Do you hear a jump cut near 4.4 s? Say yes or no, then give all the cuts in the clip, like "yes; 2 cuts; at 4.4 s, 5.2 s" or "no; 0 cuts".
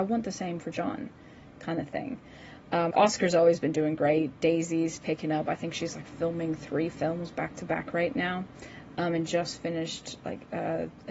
no; 1 cut; at 2.9 s